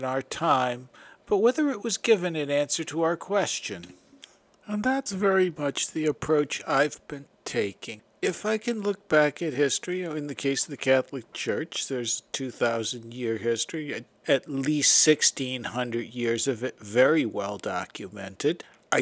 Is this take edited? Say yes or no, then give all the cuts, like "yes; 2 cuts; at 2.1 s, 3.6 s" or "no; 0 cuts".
no; 0 cuts